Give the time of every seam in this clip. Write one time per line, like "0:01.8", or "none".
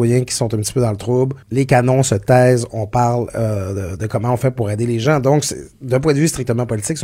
0:01.4